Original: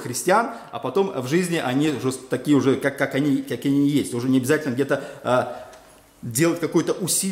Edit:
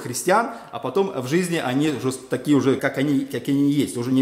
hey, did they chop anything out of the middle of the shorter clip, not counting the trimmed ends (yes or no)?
yes